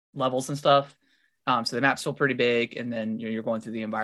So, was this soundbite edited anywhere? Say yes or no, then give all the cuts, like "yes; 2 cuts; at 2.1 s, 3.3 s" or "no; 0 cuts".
no; 0 cuts